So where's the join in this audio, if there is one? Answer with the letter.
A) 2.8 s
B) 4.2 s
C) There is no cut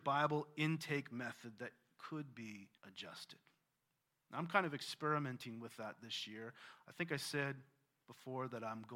A